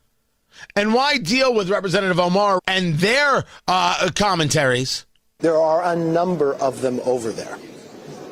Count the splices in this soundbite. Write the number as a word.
two